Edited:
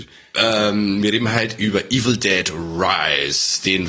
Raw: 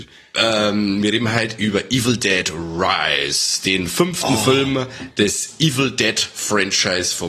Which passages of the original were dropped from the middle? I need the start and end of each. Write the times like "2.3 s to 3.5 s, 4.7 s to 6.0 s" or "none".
none

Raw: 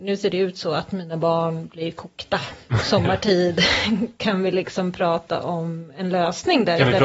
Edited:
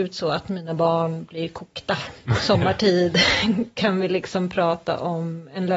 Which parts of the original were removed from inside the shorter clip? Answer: none

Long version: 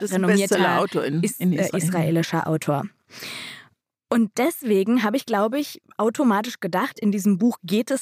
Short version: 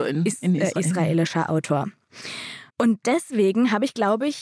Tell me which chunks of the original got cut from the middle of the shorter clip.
3.7 s to 4.0 s

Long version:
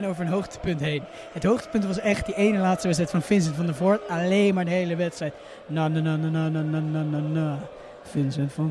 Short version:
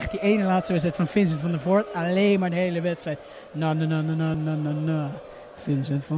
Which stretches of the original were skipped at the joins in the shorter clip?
6.5 s to 6.8 s

